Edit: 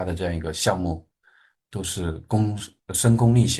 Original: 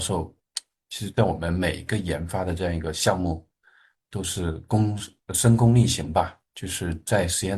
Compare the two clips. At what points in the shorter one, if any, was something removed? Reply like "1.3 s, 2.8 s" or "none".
none

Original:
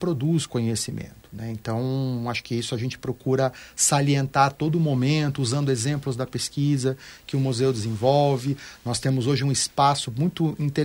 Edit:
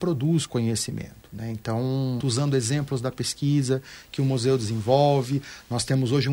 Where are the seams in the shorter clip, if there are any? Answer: 2.2 s

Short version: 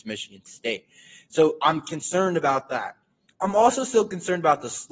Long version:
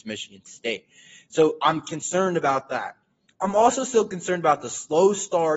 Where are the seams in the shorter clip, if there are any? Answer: none

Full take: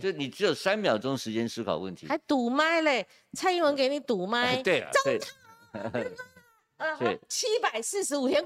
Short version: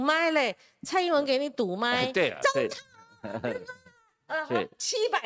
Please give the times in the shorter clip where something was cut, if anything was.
none

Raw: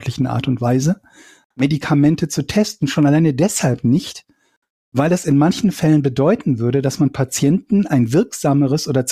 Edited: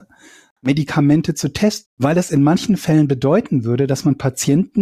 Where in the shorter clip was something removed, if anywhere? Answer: 1.9 s

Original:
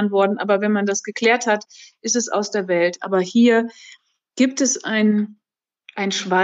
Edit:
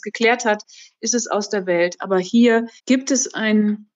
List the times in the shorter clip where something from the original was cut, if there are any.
2.8 s

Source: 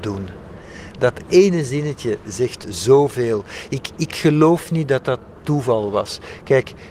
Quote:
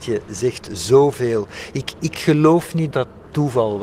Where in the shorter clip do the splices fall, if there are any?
2.9 s

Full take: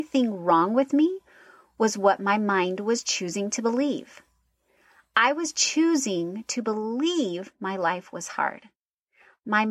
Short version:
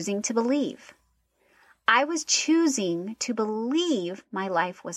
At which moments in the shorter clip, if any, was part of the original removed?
none

